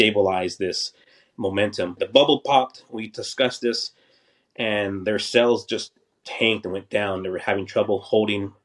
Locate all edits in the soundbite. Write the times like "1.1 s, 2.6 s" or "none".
2.0 s